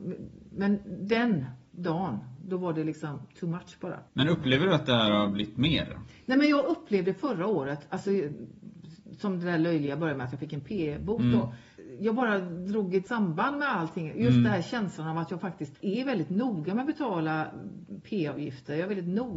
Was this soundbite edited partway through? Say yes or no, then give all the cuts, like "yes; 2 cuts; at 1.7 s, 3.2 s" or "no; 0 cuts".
yes; 1 cut; at 4.1 s